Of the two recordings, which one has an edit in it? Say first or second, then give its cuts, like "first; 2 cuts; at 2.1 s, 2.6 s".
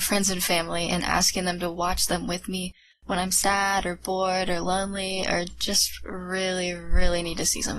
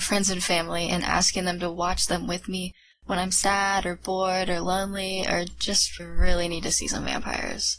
second; 1 cut; at 6.0 s